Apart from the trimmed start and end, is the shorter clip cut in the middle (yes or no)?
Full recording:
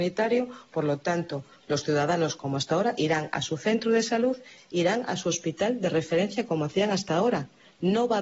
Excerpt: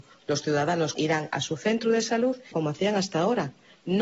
yes